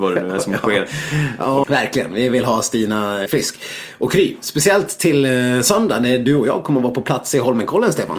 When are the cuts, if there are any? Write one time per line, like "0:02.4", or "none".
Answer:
0:01.6
0:03.3